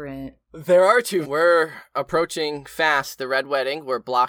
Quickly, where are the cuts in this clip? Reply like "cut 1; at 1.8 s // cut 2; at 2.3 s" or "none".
cut 1; at 1.2 s